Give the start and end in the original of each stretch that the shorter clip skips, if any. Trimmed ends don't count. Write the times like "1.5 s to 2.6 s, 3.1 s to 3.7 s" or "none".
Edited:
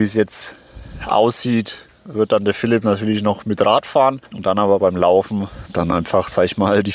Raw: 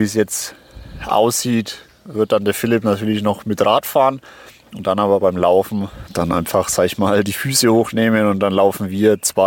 4.3 s to 4.7 s